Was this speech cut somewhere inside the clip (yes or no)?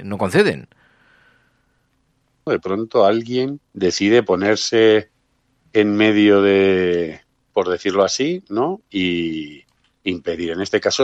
yes